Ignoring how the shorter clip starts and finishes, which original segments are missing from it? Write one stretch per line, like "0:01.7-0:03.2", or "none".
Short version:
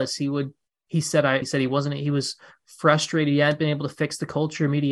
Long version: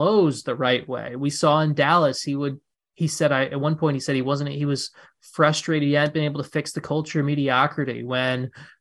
0:03.5-0:04.0